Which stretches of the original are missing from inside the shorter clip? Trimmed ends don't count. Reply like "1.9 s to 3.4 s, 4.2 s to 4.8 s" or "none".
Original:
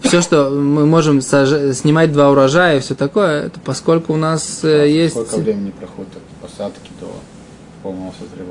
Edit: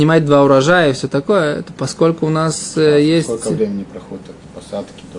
none